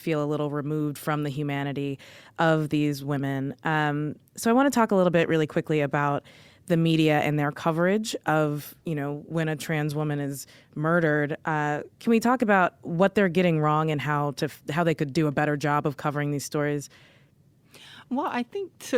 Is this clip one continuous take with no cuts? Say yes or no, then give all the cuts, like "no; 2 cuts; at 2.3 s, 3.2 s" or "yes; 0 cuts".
yes; 0 cuts